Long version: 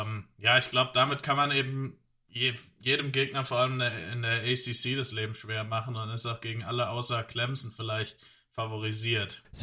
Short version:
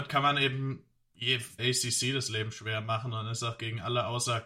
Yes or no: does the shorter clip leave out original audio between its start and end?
yes